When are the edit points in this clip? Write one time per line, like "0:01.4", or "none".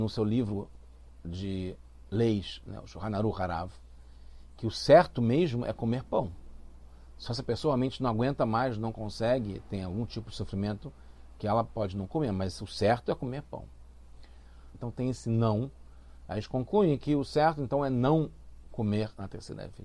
0:14.7

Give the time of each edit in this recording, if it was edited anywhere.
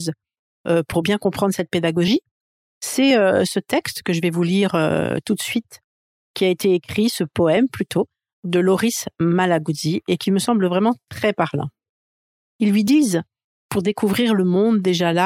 0:12.5

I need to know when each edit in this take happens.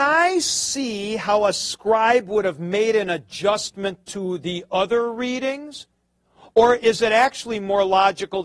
none

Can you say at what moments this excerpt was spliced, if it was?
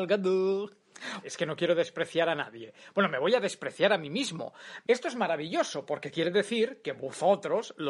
0:01.2
0:04.8

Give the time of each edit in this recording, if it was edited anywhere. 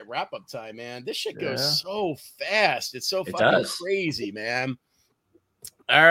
none

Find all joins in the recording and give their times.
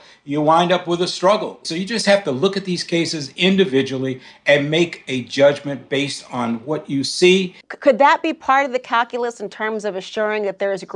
0:01.6
0:07.6

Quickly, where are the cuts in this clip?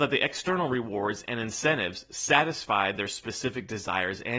none

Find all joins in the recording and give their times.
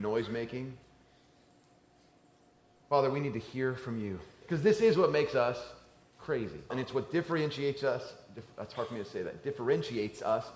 0:04.4
0:06.7

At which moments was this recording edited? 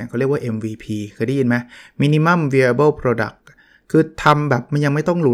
none

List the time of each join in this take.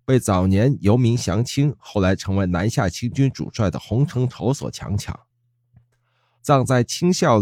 0:06.4

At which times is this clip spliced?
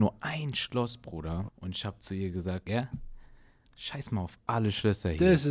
0:01.5
0:02.7

